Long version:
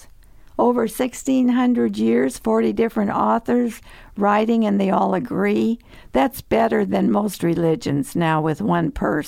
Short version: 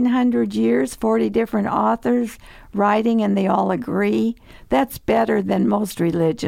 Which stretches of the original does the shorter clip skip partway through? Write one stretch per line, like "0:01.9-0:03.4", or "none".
none